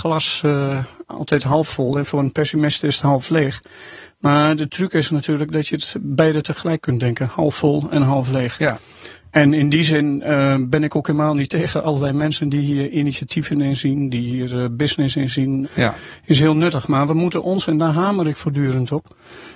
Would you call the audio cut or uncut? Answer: cut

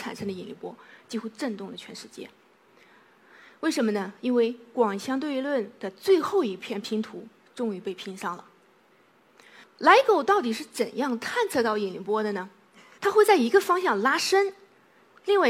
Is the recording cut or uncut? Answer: cut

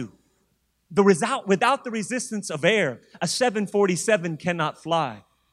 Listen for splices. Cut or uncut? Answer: uncut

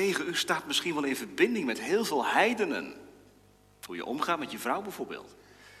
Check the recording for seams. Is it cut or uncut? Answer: cut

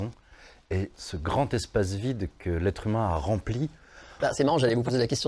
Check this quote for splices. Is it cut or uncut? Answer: cut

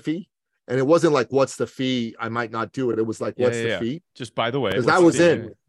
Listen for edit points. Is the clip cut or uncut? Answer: uncut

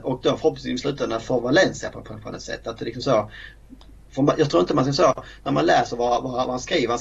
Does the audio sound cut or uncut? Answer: cut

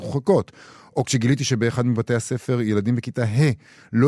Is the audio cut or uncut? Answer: uncut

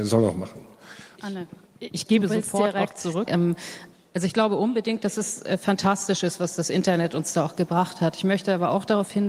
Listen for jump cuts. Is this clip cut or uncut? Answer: cut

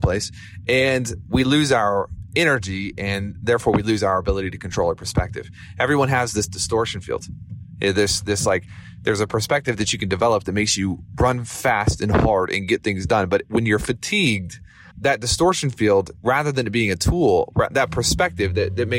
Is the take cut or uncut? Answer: cut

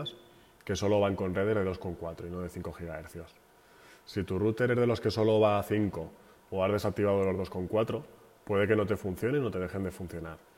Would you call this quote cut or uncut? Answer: uncut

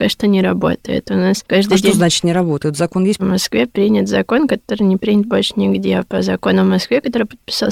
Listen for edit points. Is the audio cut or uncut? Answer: cut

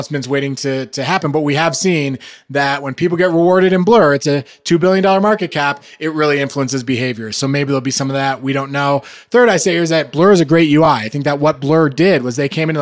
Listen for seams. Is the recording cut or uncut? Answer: uncut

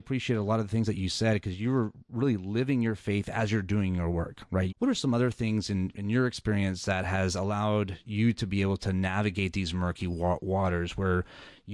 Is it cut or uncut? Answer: cut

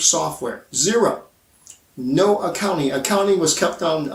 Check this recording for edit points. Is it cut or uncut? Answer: uncut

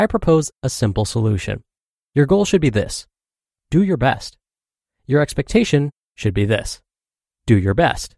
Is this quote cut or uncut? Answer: uncut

